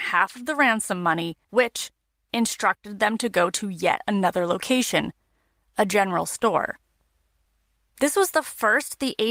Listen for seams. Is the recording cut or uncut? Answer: cut